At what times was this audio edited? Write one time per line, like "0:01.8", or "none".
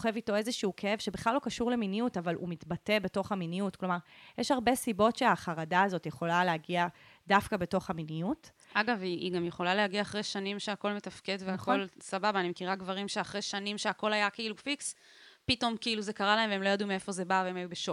none